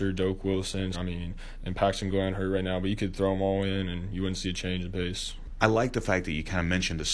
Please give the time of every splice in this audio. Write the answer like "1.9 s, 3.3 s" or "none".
0.9 s